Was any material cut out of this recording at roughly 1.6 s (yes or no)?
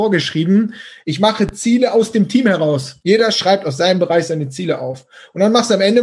no